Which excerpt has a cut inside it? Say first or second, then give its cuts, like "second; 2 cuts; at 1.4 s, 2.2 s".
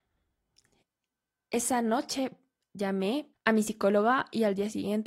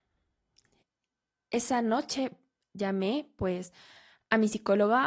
first; 1 cut; at 3.3 s